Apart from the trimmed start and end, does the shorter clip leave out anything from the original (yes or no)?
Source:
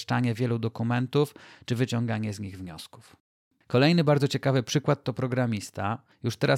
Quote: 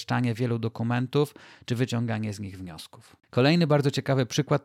yes